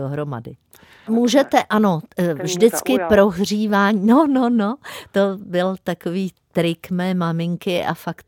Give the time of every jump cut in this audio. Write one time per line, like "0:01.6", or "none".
0:01.1